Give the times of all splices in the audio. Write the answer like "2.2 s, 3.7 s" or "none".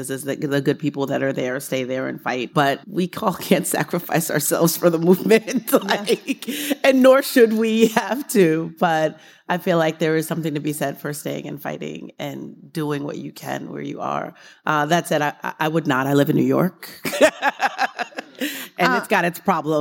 2.8 s